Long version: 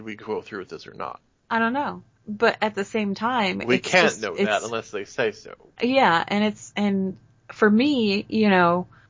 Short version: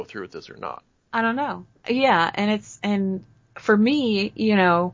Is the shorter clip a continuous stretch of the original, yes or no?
no